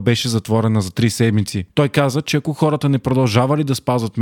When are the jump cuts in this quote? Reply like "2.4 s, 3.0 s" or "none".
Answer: 1.7 s